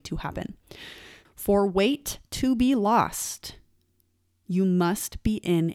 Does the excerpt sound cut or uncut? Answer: cut